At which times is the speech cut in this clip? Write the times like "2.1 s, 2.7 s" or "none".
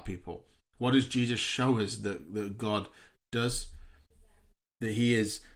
4.6 s